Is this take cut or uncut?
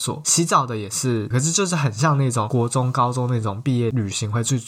cut